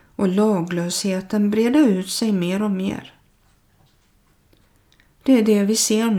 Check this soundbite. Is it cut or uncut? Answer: uncut